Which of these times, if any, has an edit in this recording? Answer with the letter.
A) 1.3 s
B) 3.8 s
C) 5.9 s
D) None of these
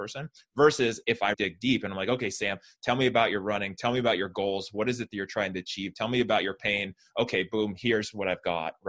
A